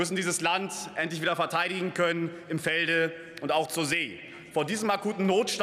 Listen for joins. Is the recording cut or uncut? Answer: uncut